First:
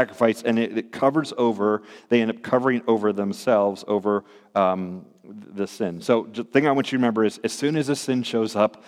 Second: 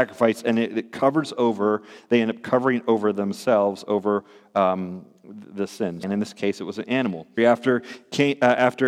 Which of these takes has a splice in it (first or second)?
second